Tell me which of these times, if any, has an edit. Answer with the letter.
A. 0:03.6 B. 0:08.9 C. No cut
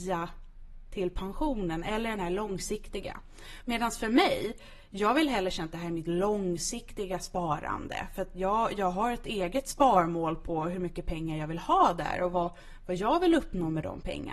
A